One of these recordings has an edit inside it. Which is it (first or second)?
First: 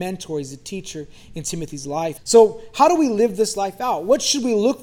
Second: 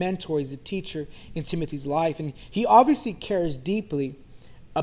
first